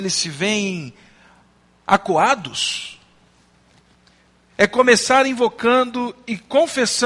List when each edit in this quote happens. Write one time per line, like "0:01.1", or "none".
none